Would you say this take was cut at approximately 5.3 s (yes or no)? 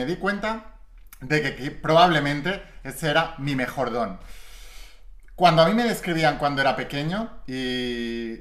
no